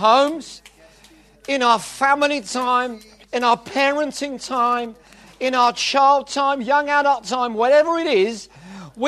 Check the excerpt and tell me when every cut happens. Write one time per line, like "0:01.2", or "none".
none